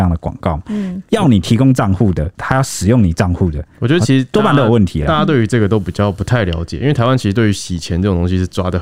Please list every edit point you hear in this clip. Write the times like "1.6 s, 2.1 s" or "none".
none